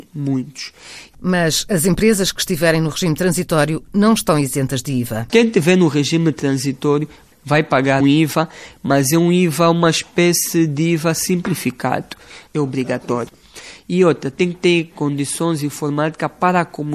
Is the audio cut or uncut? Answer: cut